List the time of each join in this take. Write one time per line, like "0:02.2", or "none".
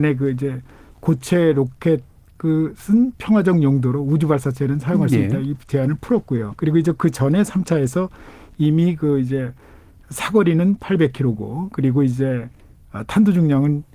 0:06.5